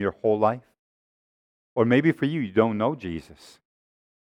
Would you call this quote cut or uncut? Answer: uncut